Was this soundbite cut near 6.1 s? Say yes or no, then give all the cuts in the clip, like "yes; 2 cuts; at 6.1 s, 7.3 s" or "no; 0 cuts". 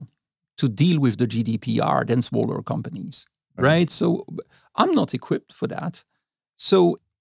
no; 1 cut; at 3.9 s